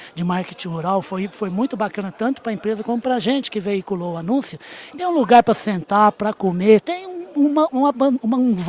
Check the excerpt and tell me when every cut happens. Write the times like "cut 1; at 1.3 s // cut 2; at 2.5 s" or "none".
cut 1; at 4.9 s // cut 2; at 6.8 s